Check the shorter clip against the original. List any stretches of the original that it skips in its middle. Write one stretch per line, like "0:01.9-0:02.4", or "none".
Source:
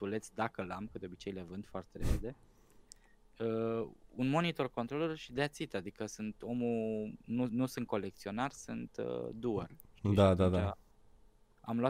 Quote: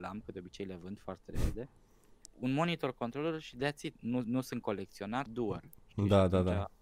0:02.9-0:04.0
0:05.7-0:07.2
0:08.5-0:09.3